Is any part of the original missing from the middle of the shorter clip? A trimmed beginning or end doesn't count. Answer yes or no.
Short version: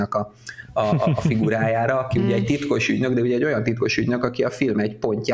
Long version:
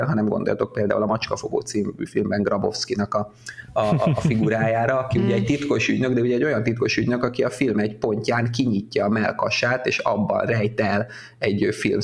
no